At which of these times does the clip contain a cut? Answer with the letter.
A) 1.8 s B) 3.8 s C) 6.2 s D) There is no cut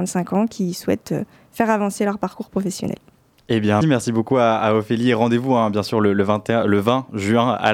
B